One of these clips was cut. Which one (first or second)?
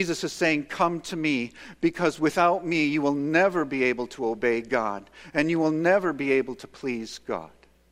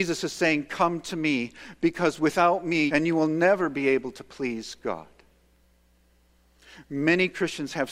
second